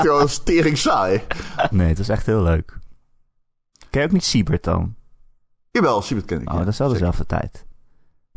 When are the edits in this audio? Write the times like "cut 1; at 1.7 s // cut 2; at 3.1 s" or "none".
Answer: cut 1; at 1.7 s